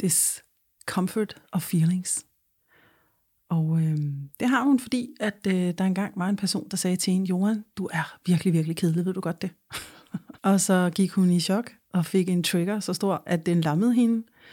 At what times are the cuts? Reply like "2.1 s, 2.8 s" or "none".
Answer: 10.4 s